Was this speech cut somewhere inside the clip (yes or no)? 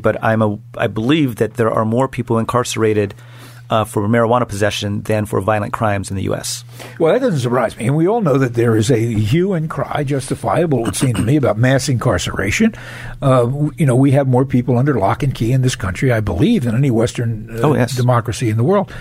no